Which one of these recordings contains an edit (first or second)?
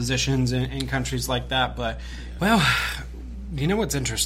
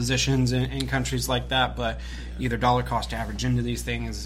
first